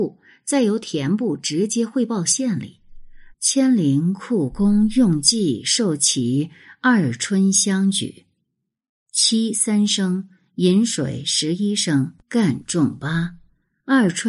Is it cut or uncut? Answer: cut